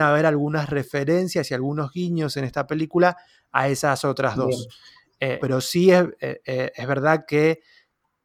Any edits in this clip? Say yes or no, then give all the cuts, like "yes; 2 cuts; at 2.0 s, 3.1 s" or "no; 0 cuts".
yes; 1 cut; at 5.4 s